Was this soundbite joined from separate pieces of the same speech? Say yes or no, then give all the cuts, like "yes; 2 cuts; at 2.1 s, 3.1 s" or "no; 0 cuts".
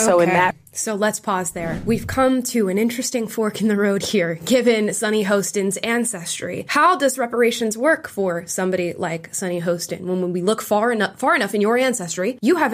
no; 0 cuts